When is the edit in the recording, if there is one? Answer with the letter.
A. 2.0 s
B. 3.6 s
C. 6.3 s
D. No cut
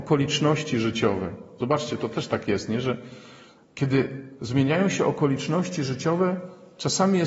D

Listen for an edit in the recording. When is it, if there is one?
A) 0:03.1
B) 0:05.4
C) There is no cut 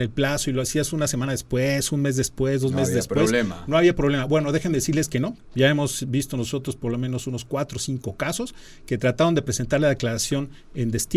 B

